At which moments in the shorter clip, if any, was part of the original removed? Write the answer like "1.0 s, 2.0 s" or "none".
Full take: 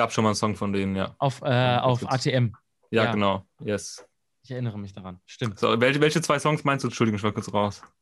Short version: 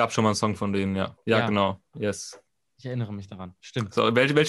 1.2 s